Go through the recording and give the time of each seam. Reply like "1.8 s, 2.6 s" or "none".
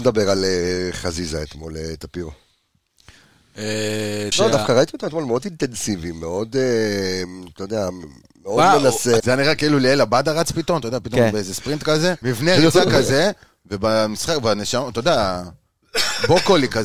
4.3 s, 9.2 s, 12.2 s